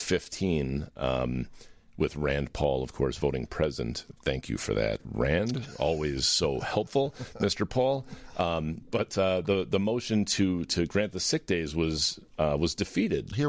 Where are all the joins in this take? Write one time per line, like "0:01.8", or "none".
none